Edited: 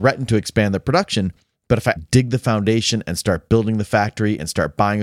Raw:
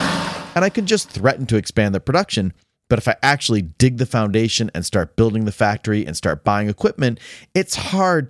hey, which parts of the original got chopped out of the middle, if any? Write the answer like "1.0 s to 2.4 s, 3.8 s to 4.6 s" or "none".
3.2 s to 3.6 s